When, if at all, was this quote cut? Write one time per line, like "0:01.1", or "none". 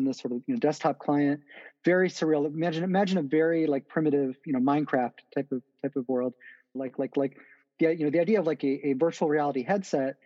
0:06.8

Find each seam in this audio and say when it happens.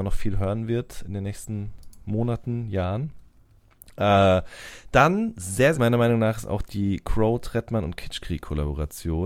0:05.7

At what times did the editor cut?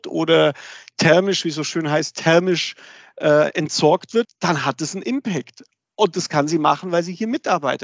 0:04.2

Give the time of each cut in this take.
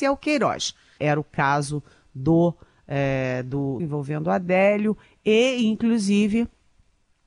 0:01.0
0:03.8

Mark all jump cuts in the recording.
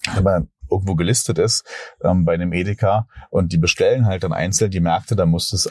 none

